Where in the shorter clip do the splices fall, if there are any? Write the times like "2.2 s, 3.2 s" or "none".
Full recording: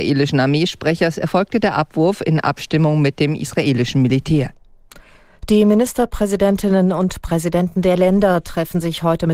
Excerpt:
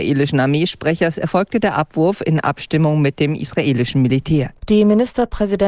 4.6 s